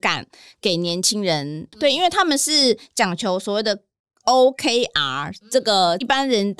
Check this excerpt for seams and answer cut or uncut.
uncut